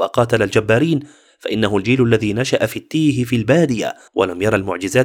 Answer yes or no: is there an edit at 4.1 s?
yes